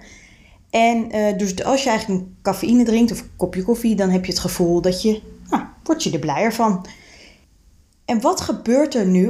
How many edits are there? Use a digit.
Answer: 0